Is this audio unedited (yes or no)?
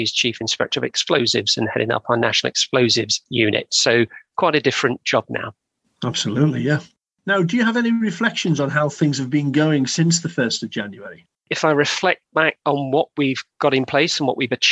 no